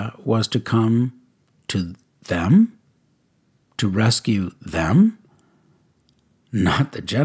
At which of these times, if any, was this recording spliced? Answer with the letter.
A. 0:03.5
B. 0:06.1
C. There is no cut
C